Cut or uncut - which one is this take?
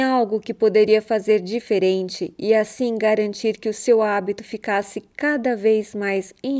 uncut